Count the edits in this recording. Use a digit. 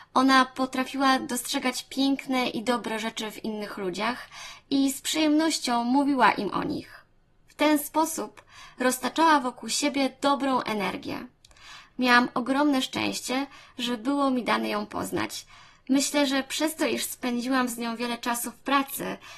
1